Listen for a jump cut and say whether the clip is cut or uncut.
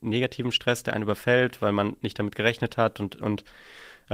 cut